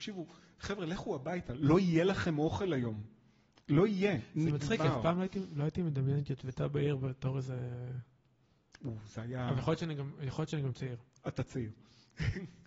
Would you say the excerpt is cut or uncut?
uncut